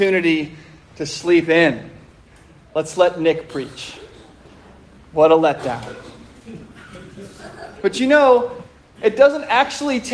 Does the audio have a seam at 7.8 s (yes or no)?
yes